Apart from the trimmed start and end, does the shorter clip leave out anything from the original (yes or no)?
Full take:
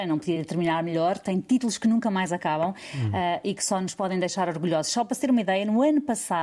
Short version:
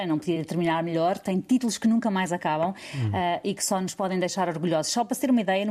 no